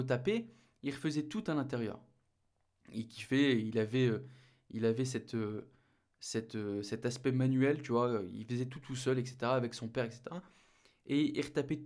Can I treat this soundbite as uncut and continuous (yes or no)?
yes